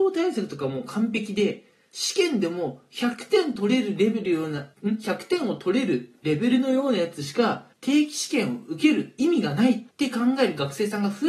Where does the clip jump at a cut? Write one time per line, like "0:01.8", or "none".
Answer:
0:04.7
0:07.7
0:09.9